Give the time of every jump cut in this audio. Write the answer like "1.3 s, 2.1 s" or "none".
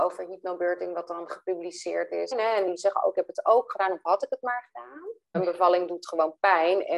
2.3 s, 5.3 s